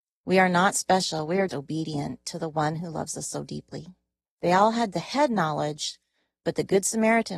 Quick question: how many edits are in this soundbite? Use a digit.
2